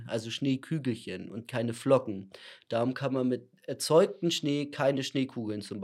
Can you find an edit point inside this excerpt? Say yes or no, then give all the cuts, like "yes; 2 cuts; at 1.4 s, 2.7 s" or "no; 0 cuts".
no; 0 cuts